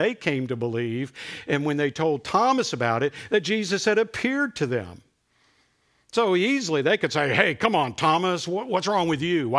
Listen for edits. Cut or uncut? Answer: uncut